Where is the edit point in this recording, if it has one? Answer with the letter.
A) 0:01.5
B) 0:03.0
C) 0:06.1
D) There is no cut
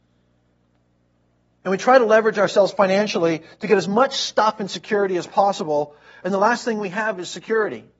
D